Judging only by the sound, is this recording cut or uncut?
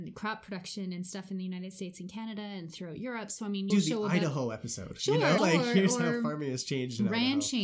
cut